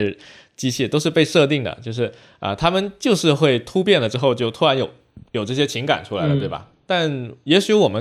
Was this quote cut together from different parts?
no; 0 cuts

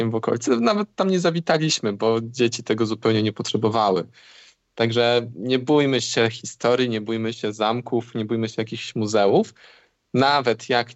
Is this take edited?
no; 0 cuts

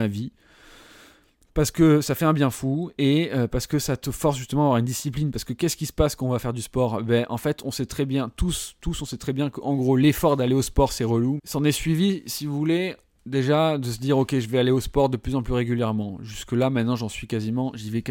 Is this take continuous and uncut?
no; 1 cut; at 11.4 s

